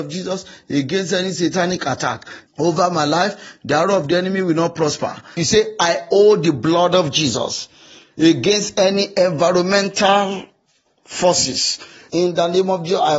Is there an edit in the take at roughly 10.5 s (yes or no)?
no